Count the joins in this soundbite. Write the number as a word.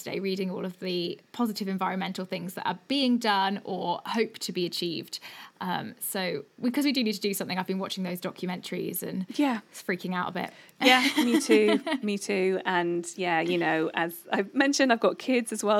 zero